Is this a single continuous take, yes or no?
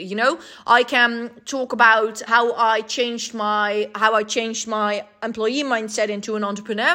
no